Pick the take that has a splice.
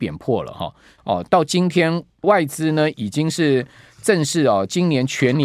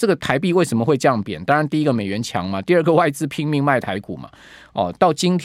first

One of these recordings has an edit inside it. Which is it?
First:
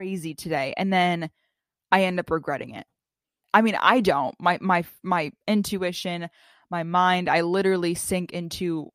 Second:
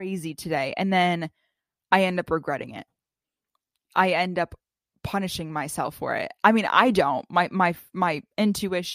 first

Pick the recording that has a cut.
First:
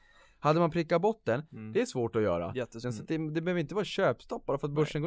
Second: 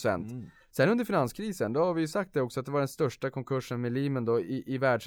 first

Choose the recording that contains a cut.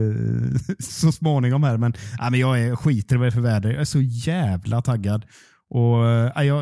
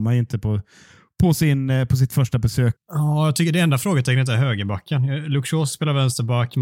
second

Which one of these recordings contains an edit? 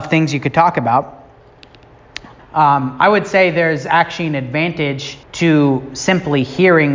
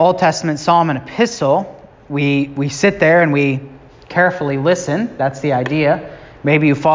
first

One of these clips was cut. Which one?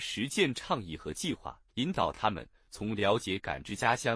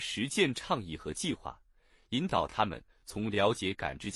first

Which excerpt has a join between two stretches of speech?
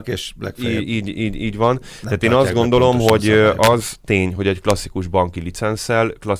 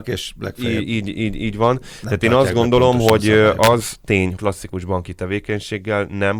second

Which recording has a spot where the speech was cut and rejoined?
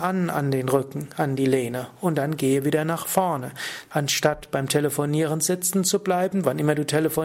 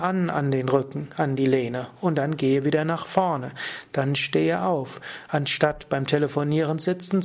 first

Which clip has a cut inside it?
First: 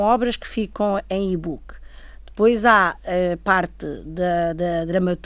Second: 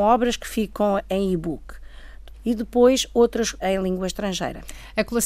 second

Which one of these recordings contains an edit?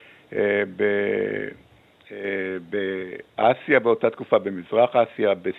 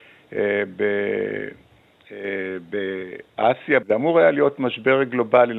second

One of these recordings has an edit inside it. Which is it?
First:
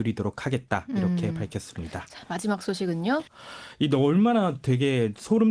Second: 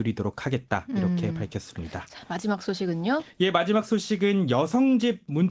first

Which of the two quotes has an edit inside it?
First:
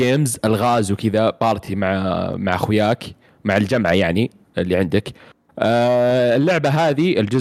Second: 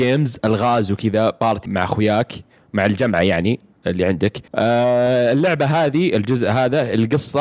second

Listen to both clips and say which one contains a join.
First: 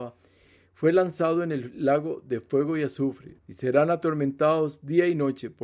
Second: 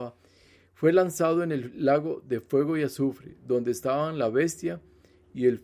first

